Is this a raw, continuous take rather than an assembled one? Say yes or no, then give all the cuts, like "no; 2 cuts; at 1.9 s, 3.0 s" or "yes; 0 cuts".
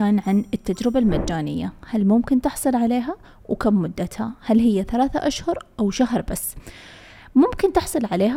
yes; 0 cuts